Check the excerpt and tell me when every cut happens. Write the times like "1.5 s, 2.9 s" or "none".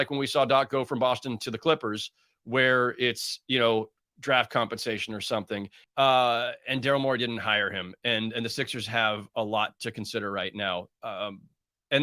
5.8 s